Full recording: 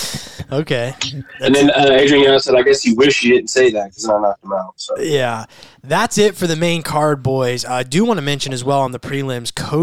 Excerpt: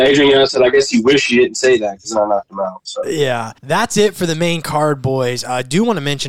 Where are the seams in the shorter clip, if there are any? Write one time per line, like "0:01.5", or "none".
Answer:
0:03.6